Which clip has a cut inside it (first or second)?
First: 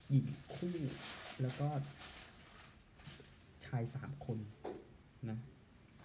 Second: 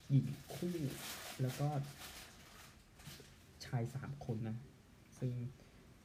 second